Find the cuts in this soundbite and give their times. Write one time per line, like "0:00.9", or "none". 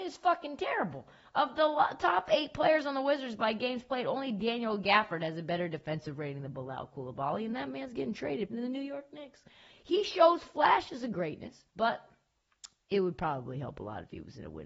0:08.5
0:11.7